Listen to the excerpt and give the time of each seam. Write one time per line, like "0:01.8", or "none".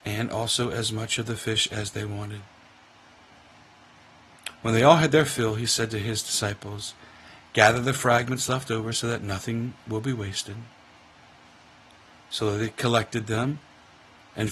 none